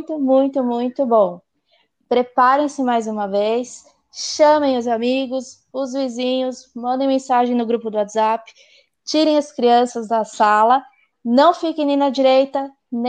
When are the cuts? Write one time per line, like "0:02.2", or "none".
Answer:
none